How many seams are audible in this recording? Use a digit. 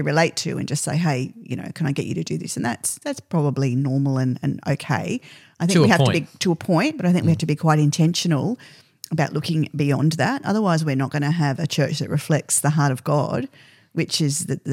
0